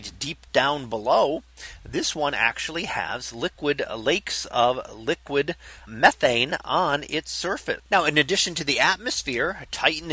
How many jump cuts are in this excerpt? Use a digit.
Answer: 2